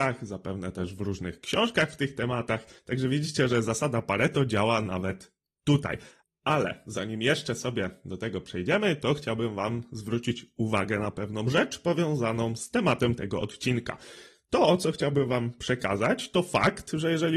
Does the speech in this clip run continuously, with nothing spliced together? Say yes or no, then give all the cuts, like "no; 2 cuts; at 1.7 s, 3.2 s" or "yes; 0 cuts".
yes; 0 cuts